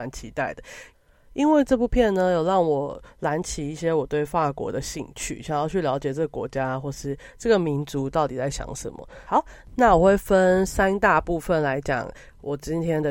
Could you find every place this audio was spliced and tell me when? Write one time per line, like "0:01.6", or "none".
0:09.3